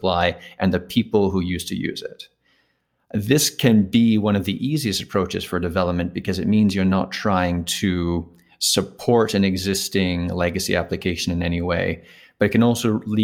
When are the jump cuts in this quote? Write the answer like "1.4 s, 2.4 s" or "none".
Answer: none